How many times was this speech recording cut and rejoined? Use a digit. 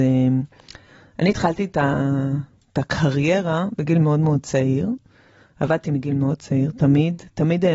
0